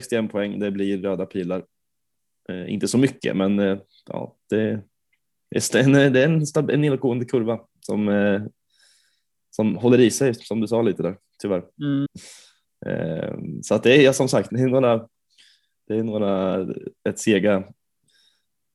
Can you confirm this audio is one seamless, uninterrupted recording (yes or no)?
no